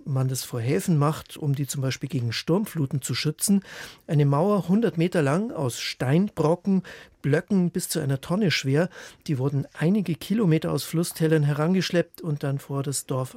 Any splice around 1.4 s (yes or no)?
no